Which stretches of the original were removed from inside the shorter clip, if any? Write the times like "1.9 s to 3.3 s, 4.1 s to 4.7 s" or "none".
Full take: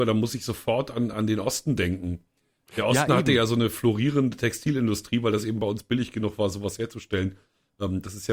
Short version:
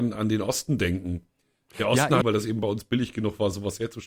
3.2 s to 5.2 s